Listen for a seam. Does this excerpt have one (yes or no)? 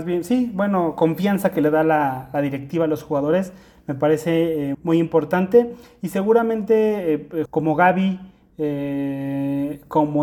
yes